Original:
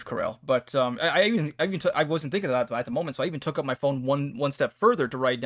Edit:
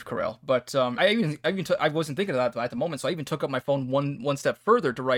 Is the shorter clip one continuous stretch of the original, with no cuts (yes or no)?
no